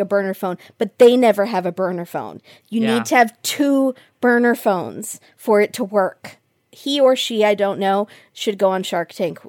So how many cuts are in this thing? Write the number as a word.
zero